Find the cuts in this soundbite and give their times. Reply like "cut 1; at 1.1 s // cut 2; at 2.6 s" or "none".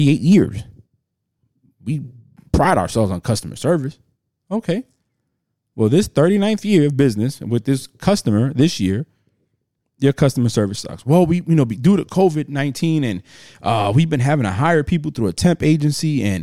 none